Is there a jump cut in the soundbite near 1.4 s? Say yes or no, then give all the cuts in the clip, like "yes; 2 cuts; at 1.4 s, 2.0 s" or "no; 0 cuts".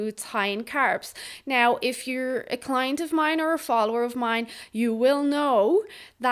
no; 0 cuts